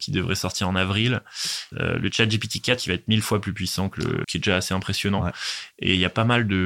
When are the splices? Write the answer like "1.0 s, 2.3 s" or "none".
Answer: 1.7 s, 4.2 s

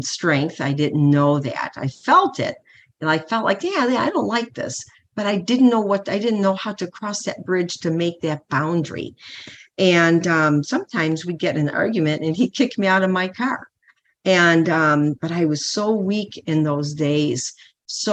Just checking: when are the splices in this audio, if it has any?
15.2 s

